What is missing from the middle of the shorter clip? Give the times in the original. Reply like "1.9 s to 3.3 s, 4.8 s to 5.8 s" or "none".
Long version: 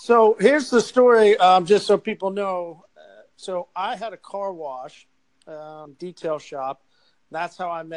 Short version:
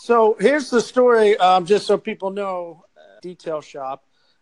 3.2 s to 6.0 s

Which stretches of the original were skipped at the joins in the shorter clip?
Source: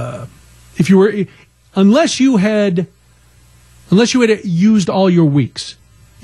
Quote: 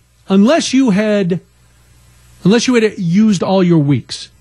none

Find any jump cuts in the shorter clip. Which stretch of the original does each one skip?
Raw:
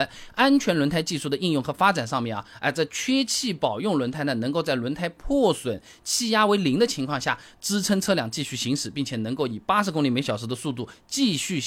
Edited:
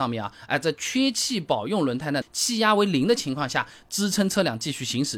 4.3 s to 5.9 s

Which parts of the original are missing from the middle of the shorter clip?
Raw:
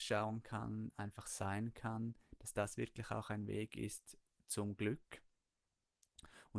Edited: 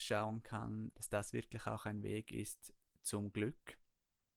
0.9 s to 2.4 s

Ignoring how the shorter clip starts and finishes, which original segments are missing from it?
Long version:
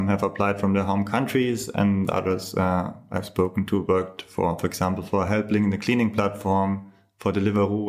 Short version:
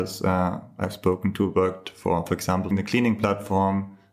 5.0 s to 5.6 s

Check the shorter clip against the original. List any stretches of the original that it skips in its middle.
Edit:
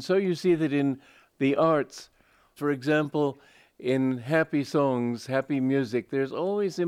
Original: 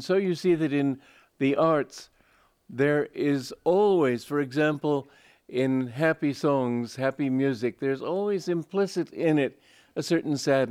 2.6 s to 4.3 s

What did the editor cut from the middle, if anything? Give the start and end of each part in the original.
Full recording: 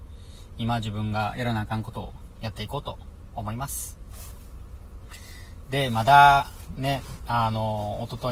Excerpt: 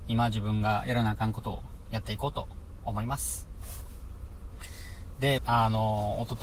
5.9 s to 7.2 s

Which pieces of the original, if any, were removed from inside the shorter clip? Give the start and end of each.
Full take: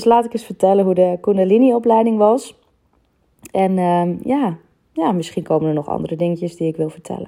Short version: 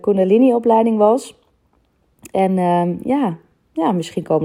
none

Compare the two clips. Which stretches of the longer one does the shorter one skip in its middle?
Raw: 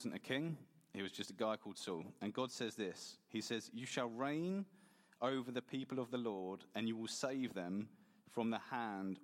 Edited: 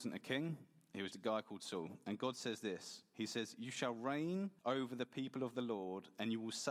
1.1 s to 1.3 s, 4.7 s to 5.1 s

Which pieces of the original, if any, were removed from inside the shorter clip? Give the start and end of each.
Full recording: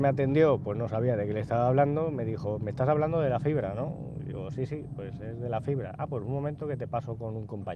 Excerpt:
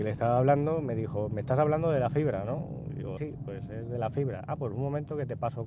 4.5 s to 4.7 s

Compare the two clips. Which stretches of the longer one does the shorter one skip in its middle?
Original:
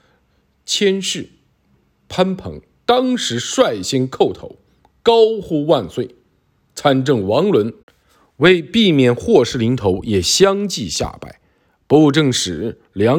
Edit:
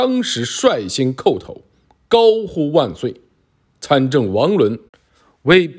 none

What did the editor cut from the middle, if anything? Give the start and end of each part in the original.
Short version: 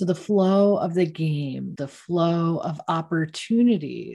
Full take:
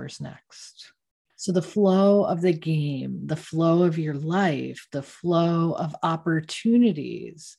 3.2 s to 4.9 s

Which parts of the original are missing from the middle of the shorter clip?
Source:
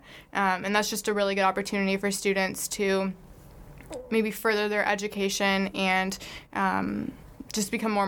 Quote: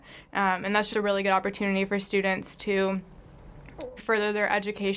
0.9 s to 1.0 s, 4.1 s to 4.3 s

